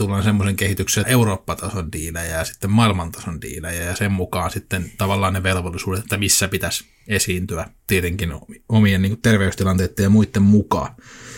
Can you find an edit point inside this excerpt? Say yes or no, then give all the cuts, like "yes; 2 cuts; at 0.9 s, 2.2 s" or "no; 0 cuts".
yes; 2 cuts; at 1.0 s, 7.8 s